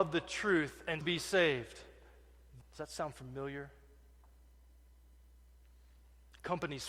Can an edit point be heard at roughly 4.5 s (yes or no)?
no